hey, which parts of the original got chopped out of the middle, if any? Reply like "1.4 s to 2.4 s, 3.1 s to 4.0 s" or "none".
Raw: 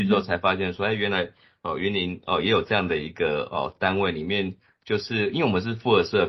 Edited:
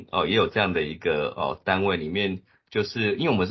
none